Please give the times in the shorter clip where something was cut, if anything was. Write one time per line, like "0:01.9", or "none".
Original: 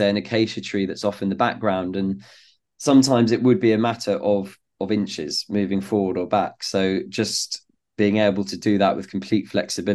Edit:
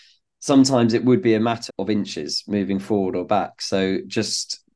0:01.7